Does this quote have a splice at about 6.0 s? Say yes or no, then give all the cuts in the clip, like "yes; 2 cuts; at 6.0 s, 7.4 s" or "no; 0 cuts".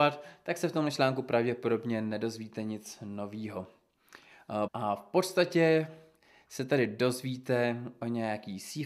no; 1 cut; at 4.7 s